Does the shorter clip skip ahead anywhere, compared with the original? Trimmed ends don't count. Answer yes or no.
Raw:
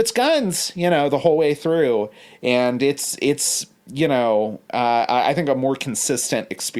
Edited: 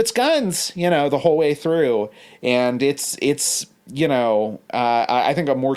no